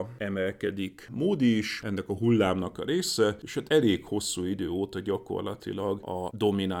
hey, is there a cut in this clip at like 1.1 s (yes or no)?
no